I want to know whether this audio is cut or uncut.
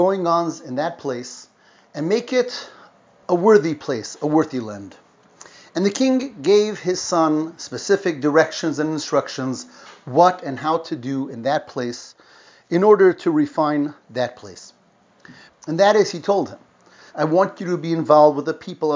cut